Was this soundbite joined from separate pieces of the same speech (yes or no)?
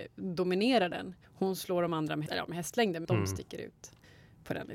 yes